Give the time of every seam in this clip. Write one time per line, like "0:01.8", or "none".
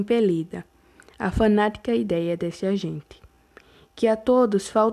none